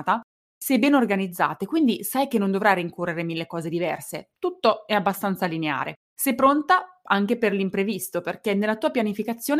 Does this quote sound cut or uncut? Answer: cut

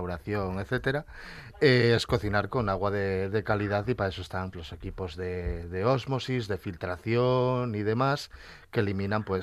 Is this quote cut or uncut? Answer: cut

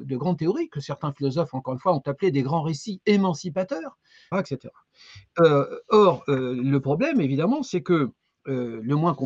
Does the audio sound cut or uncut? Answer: cut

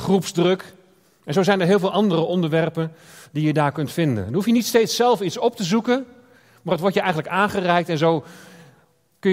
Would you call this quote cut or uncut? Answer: uncut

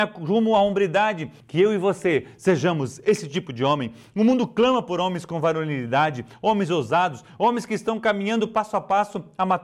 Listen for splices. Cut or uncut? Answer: cut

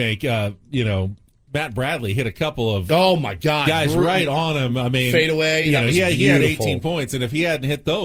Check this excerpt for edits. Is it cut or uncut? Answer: uncut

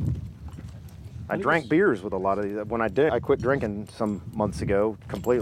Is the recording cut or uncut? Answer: cut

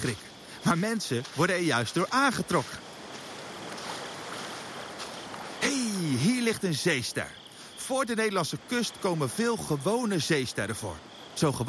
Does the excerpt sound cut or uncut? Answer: uncut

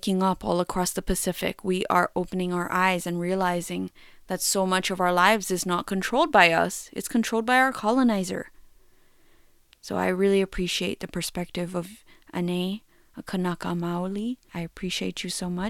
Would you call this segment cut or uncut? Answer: uncut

